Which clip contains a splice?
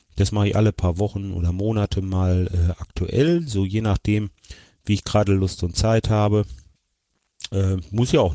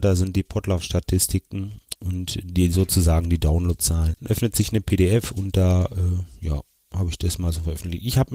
second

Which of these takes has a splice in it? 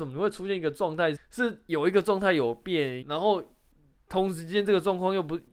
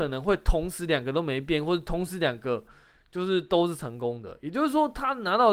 first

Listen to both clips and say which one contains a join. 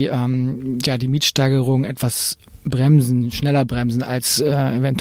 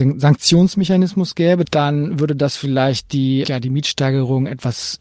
second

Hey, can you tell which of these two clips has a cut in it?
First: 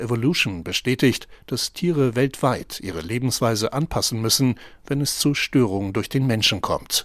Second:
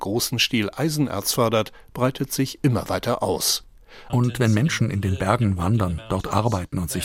second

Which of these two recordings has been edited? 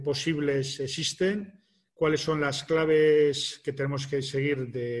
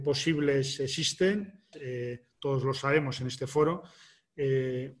second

